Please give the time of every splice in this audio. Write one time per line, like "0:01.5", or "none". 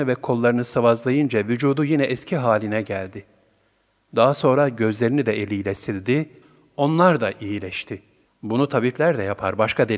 0:08.3

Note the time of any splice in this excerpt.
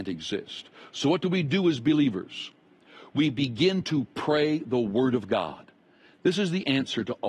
none

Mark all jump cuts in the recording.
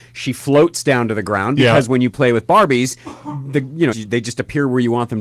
0:03.9

